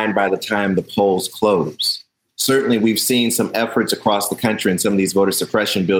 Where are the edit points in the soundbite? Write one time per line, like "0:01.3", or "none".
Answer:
0:02.3